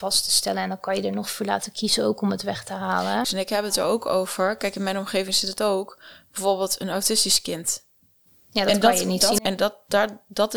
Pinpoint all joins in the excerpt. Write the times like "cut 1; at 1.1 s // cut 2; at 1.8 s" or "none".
cut 1; at 3.2 s // cut 2; at 9.4 s

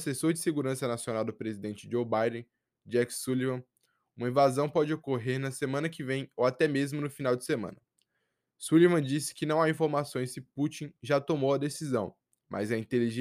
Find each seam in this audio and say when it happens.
none

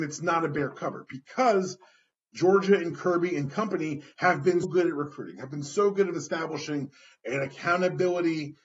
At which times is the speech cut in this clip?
cut 1; at 4.6 s

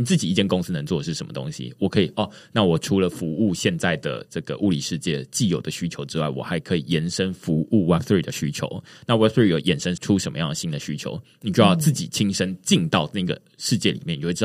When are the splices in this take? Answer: cut 1; at 10.0 s

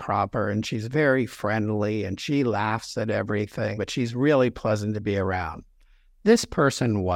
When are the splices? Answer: cut 1; at 3.8 s

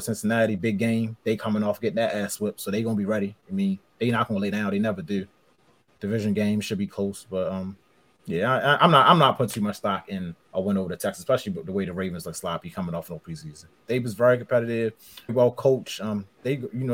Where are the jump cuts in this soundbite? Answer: cut 1; at 10.4 s // cut 2; at 13.8 s // cut 3; at 15.3 s

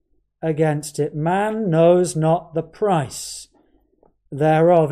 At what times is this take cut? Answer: none

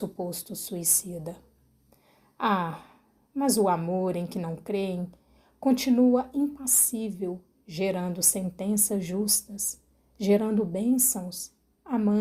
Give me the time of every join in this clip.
none

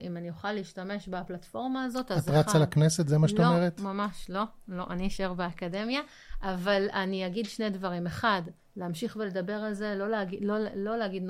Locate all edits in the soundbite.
none

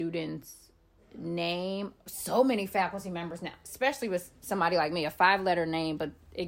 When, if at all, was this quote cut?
none

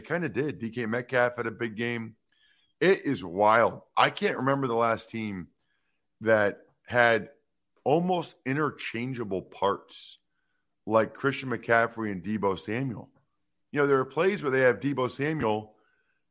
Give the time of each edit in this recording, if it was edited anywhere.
cut 1; at 2.7 s // cut 2; at 13.6 s

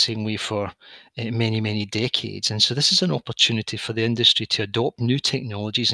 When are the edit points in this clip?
none

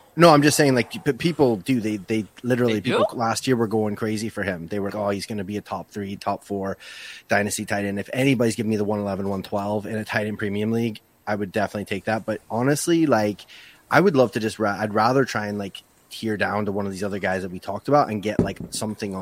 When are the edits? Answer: cut 1; at 4.9 s

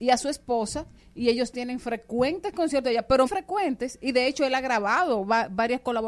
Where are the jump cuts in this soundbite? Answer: cut 1; at 3.3 s

